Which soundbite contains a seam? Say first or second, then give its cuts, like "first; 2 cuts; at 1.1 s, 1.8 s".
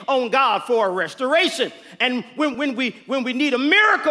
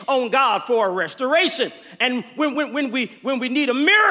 first; 1 cut; at 2.5 s